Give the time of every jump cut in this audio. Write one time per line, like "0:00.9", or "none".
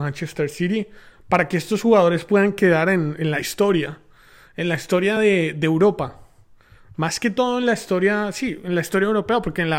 none